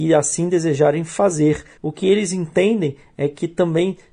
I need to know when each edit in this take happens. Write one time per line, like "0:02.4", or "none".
0:01.8